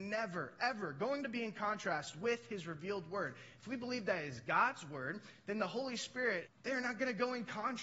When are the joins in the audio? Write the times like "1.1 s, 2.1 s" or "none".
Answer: 6.5 s

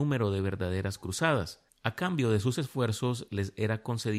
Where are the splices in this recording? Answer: 1.7 s

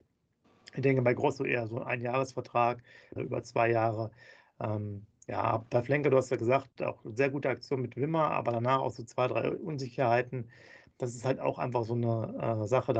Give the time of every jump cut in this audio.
3.2 s

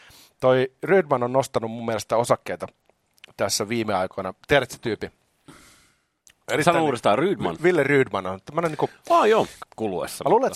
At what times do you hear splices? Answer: 9.6 s

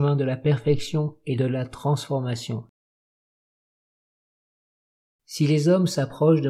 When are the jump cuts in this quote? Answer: 5.2 s

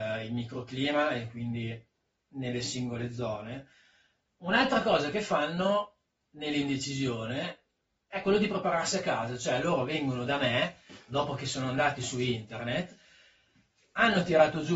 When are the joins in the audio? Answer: 4.3 s

